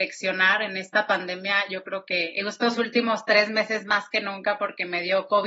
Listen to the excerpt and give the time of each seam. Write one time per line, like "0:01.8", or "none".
none